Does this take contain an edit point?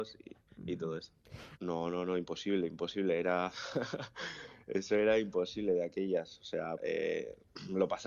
yes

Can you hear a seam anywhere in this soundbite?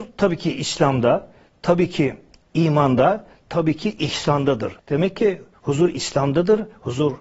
yes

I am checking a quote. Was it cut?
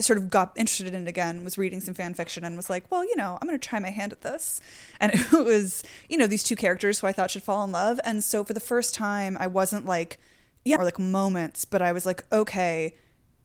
yes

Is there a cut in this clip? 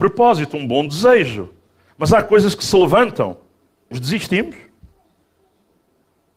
yes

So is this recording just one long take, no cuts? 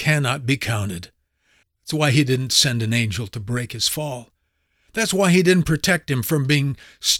no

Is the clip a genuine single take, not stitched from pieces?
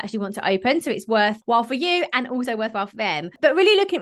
yes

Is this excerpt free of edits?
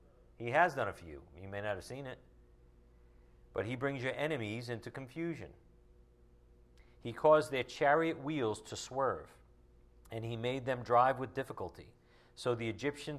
yes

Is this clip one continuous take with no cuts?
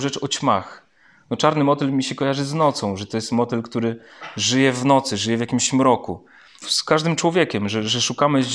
no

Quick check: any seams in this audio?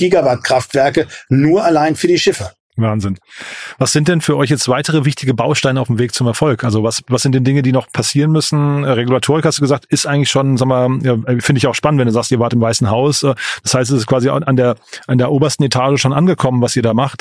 no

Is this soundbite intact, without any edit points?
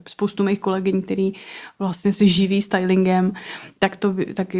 yes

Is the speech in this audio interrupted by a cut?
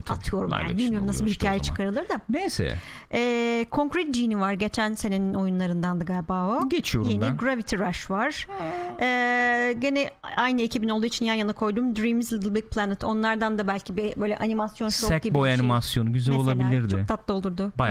no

